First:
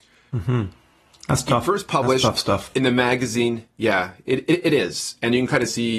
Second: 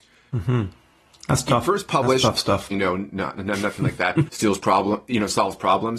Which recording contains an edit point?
second; 2 cuts; at 2.7 s, 4.3 s

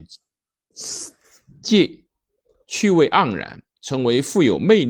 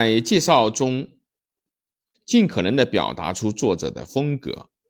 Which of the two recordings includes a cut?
second; 1 cut; at 2.1 s

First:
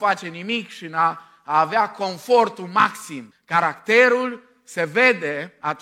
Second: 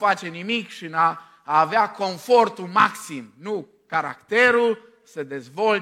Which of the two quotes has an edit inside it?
first; 1 cut; at 3.3 s

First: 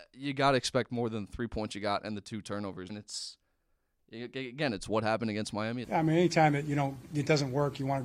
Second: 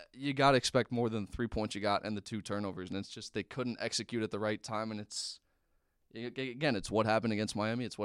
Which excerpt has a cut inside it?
first; 2 cuts; at 2.9 s, 5.8 s

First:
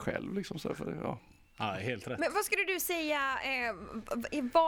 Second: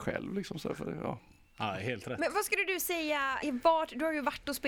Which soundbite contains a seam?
second; 1 cut; at 3.4 s

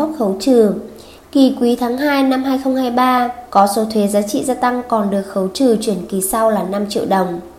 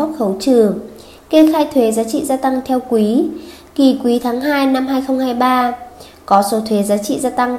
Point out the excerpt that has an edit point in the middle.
first; 2 cuts; at 1.2 s, 3.5 s

